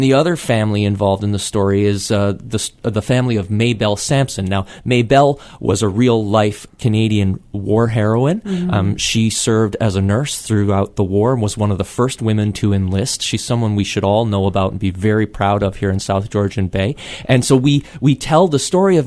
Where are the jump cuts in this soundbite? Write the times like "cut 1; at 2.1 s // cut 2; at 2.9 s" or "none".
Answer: none